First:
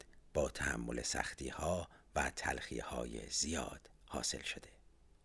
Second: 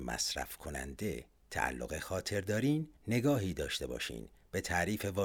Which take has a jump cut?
second; 1 cut; at 3.0 s

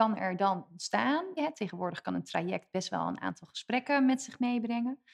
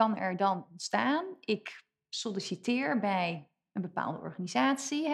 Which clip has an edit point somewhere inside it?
first; 1 cut; at 1.4 s

